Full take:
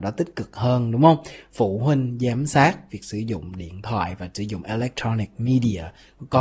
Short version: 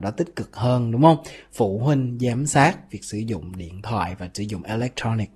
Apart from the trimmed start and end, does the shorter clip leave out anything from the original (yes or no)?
no